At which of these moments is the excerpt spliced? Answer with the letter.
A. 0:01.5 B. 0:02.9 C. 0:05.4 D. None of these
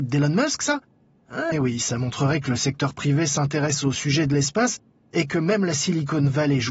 A